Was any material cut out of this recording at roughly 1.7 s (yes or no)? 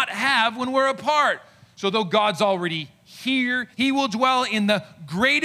no